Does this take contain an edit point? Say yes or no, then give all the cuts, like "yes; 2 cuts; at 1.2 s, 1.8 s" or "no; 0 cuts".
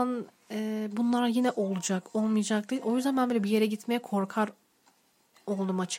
no; 0 cuts